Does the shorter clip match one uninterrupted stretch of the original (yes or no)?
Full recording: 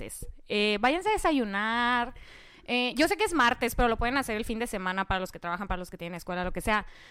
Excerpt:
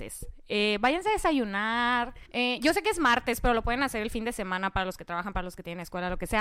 no